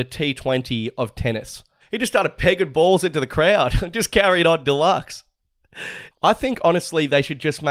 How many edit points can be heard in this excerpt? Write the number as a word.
two